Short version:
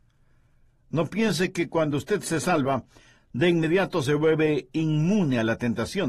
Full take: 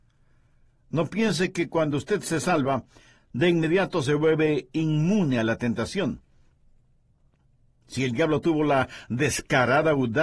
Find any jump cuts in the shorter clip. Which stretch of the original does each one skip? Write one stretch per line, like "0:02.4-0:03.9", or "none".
none